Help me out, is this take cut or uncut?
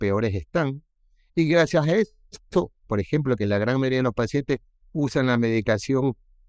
cut